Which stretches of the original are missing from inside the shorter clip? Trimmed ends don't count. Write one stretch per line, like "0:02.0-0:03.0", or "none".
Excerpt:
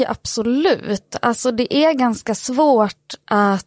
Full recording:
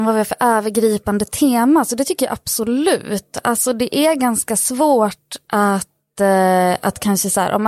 none